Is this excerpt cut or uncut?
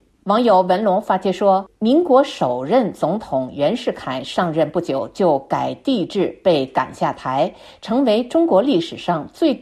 uncut